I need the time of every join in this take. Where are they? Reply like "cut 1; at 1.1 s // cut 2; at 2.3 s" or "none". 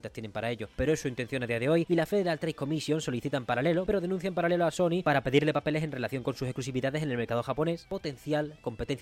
cut 1; at 3.9 s